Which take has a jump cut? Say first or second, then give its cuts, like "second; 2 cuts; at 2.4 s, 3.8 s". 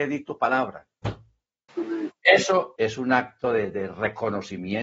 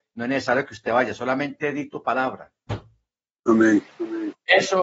first; 2 cuts; at 1.7 s, 2.8 s